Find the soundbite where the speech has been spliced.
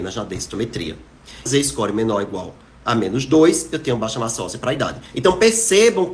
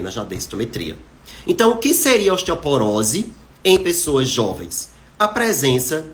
first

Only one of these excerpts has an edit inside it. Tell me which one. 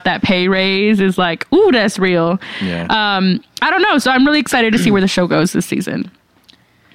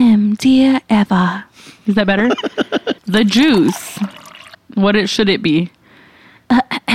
second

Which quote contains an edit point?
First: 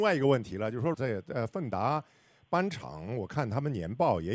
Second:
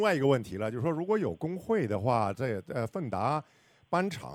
first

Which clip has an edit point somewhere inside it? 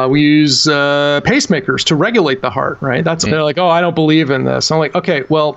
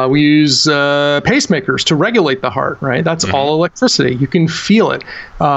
first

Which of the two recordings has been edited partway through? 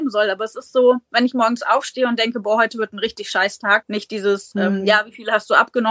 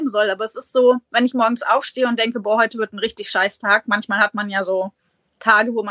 first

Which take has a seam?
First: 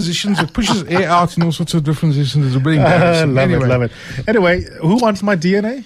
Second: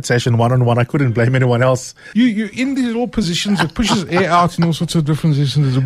second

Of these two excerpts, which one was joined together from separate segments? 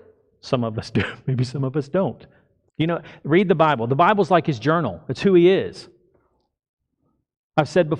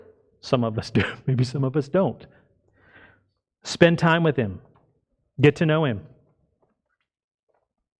first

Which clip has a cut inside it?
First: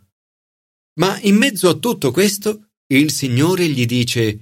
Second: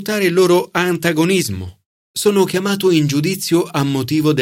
second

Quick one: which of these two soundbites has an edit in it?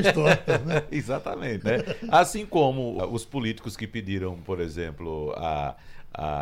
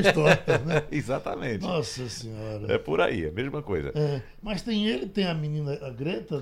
first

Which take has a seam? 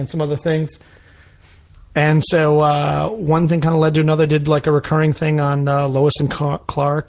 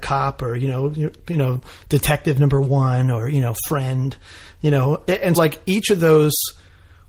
second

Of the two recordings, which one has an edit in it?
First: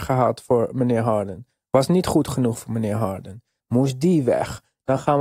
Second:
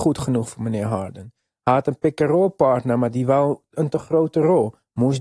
first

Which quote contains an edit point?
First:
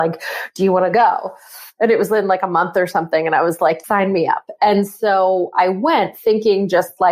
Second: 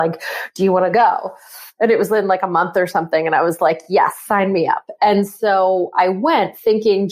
first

